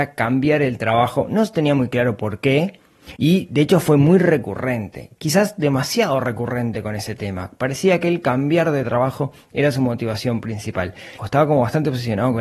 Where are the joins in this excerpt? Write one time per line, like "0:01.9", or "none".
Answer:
0:03.1
0:11.2